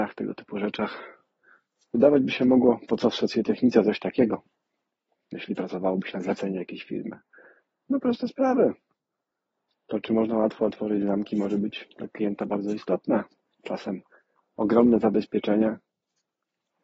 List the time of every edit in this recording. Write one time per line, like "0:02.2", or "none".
none